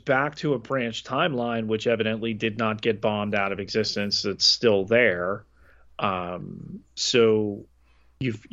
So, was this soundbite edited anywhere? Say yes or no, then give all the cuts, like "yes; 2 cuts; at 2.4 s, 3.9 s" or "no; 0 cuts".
no; 0 cuts